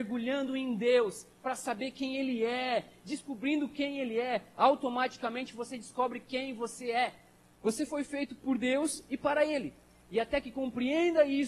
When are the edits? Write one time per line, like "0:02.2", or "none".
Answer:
0:07.5